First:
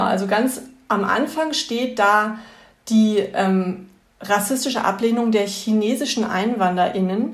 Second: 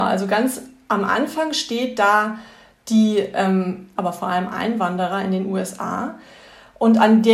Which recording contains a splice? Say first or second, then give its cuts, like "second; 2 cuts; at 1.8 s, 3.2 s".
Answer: second; 1 cut; at 4.0 s